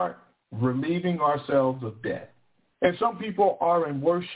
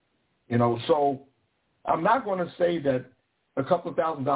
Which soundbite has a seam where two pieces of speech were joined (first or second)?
first